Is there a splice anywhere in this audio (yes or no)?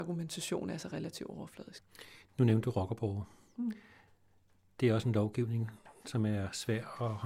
no